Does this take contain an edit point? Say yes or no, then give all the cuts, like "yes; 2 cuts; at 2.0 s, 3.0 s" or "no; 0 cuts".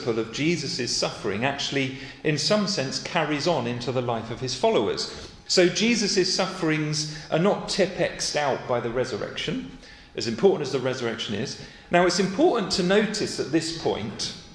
yes; 2 cuts; at 5.5 s, 11.9 s